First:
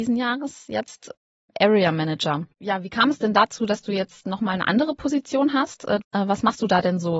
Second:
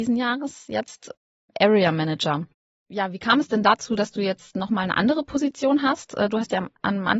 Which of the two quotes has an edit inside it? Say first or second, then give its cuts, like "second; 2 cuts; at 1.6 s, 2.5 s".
first; 2 cuts; at 2.5 s, 6.0 s